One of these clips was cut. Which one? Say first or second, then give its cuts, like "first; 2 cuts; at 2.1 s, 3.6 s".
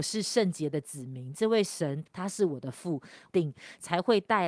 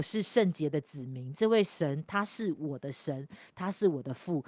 first; 2 cuts; at 2.1 s, 3.3 s